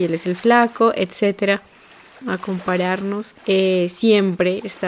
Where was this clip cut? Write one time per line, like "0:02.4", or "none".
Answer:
0:02.2
0:03.4